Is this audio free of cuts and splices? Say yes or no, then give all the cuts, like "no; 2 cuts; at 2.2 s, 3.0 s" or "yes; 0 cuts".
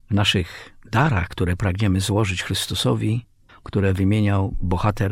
no; 1 cut; at 3.5 s